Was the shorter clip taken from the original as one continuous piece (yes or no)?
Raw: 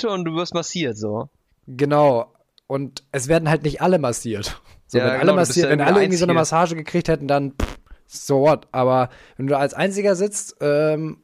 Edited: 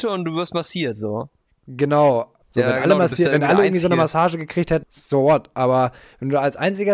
no